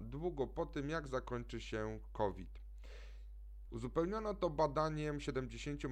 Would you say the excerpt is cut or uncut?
cut